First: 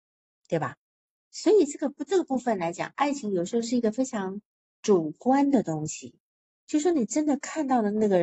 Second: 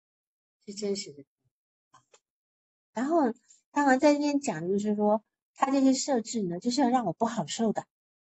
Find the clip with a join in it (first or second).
second